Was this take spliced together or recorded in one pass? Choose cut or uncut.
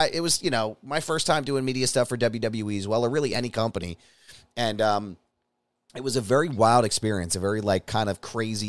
uncut